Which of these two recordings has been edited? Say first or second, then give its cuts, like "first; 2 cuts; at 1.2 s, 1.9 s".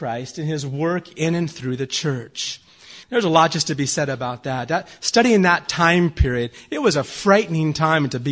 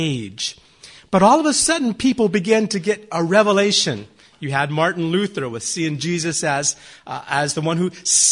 first; 1 cut; at 3.0 s